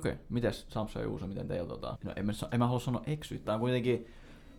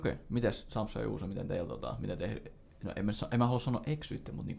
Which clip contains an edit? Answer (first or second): first